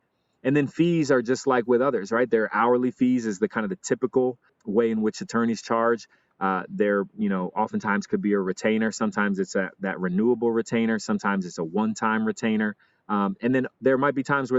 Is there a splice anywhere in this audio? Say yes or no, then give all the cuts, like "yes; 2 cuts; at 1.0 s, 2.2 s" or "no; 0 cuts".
no; 0 cuts